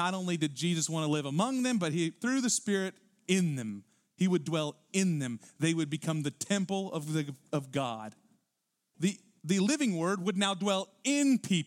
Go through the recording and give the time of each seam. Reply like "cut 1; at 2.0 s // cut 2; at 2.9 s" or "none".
cut 1; at 8.9 s

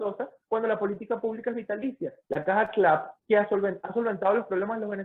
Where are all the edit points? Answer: none

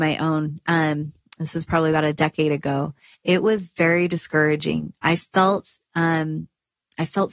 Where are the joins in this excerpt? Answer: none

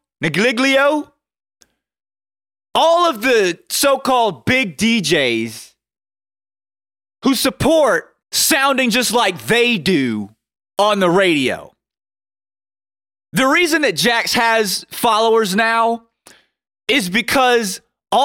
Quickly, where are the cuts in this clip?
cut 1; at 8.2 s

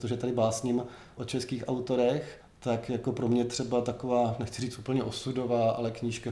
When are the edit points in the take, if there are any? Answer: cut 1; at 1.2 s

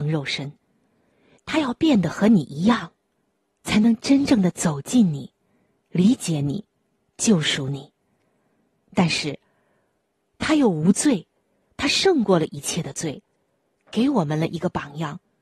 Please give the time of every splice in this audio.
cut 1; at 1.3 s

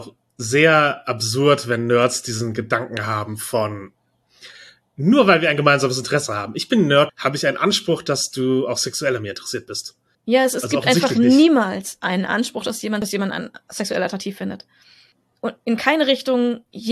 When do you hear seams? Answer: cut 1; at 7.1 s // cut 2; at 10.1 s

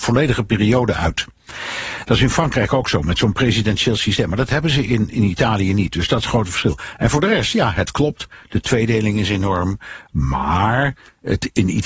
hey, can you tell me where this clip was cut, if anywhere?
cut 1; at 5.1 s

